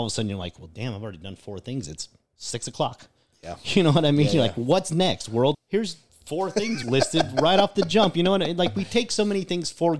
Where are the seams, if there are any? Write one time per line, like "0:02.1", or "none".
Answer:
0:05.5
0:06.8